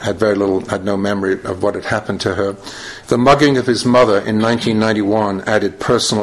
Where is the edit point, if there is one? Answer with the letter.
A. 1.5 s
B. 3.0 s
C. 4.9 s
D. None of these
B